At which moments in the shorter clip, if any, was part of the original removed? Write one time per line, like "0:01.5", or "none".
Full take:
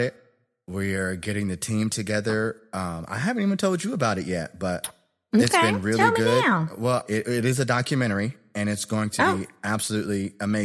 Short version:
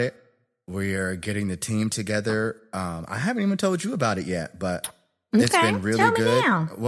none